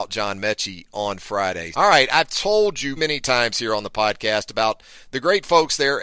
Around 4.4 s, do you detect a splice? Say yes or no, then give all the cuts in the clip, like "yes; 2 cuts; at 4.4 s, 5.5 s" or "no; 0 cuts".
no; 2 cuts; at 1.7 s, 3.0 s